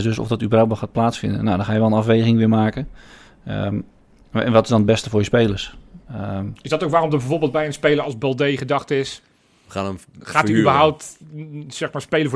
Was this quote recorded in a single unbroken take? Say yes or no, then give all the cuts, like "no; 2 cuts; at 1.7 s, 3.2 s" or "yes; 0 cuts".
no; 1 cut; at 6.0 s